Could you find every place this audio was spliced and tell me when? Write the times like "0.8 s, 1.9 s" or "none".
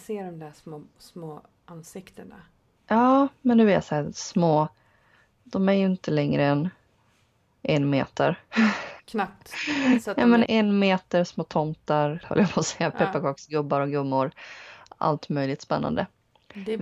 10.5 s, 12.2 s